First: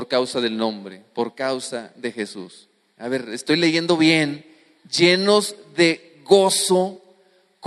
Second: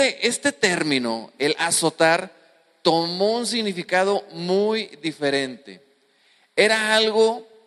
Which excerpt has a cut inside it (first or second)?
first